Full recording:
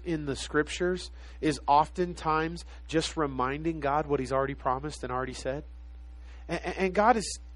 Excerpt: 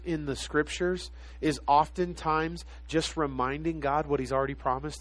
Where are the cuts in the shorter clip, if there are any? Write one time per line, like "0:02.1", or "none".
none